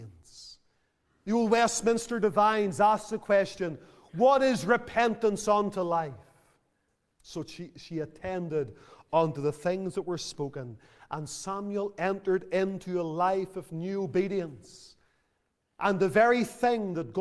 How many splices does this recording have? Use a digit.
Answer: 1